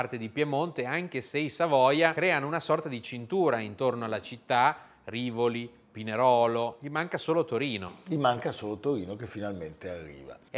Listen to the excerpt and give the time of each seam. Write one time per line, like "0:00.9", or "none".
none